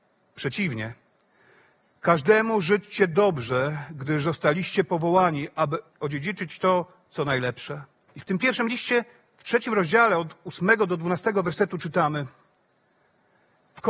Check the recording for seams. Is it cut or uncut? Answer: cut